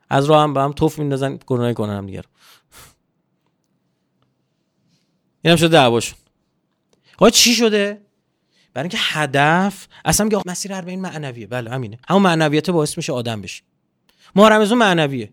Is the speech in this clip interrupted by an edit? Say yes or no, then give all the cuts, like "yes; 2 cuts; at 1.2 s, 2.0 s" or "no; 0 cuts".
yes; 2 cuts; at 10.4 s, 12.0 s